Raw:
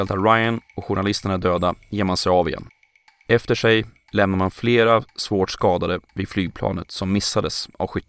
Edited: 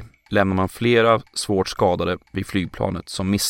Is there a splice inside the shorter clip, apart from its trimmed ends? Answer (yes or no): no